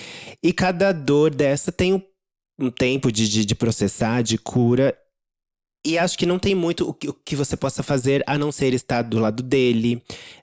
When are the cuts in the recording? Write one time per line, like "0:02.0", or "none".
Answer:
none

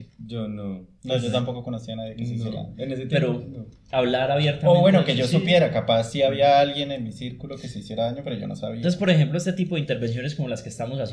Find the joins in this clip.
none

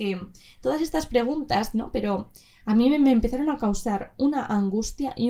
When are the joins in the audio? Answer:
0:01.7

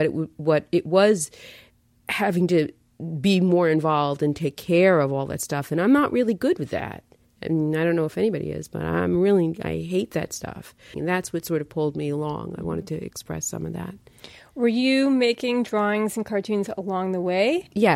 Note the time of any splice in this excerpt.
0:10.9

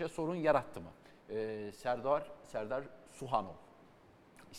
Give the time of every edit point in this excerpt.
none

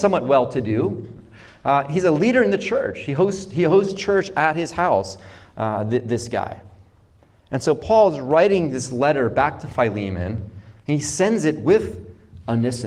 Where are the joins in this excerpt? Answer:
none

